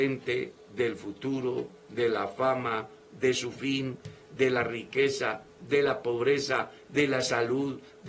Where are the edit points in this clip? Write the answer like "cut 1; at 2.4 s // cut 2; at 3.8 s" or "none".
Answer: none